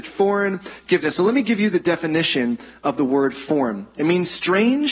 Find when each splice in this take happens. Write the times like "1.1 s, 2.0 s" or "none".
none